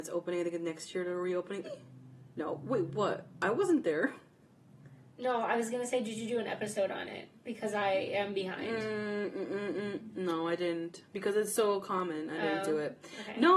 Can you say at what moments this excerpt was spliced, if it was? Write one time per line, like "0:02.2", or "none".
0:01.6